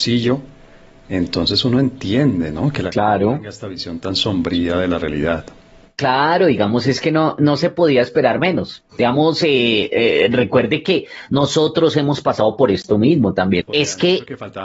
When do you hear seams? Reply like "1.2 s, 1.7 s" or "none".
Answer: 13.6 s

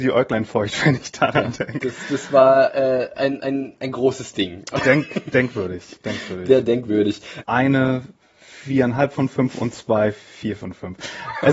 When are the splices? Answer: 7.4 s

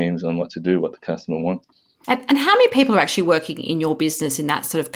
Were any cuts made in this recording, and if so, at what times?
none

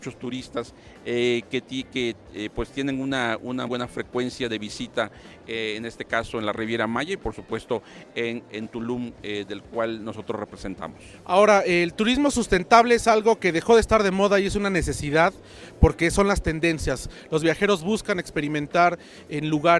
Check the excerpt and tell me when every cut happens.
3.7 s

